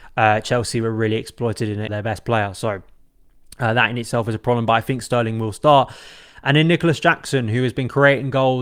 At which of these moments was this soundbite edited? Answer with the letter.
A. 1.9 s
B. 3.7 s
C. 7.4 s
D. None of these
A